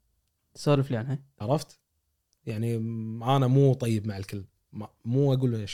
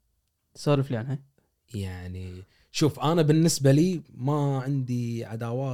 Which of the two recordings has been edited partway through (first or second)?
first